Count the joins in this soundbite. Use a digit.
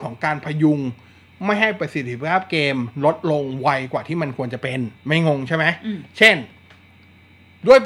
1